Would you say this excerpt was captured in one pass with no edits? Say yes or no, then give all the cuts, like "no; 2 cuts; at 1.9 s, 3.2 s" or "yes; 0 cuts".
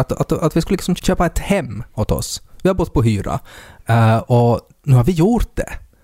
no; 1 cut; at 1.0 s